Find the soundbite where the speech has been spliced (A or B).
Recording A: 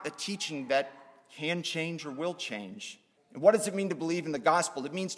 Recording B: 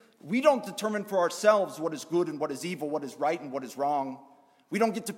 A